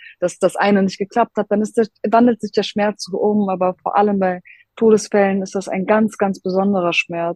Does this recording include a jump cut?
no; 0 cuts

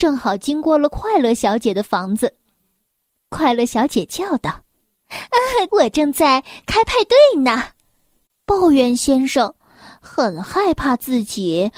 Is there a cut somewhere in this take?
yes; 2 cuts; at 5.7 s, 8.3 s

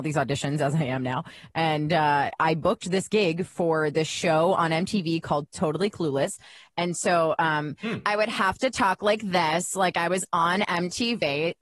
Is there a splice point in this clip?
no; 0 cuts

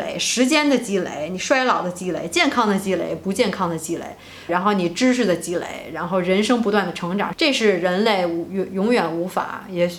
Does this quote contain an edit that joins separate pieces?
yes; 2 cuts; at 4.5 s, 7.3 s

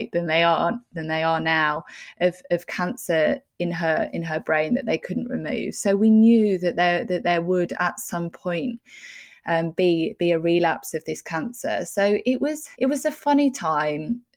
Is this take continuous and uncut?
no; 1 cut; at 12.7 s

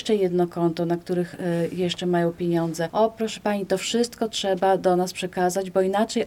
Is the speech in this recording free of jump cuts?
yes; 0 cuts

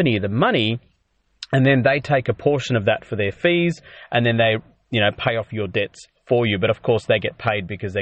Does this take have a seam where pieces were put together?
no; 0 cuts

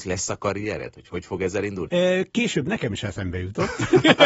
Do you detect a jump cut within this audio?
yes; 1 cut; at 1.9 s

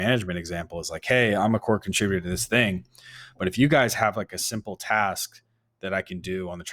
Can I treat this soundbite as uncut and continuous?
yes; 0 cuts

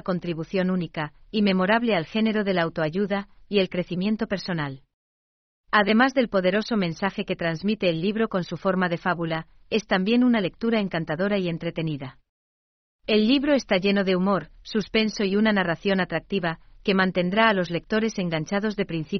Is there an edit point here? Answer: yes; 1 cut; at 9.6 s

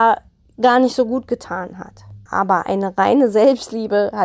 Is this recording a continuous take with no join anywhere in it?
no; 1 cut; at 2.3 s

